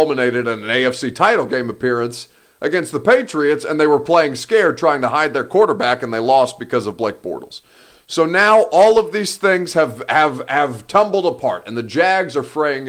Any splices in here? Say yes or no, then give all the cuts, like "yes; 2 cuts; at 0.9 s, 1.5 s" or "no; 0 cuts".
no; 0 cuts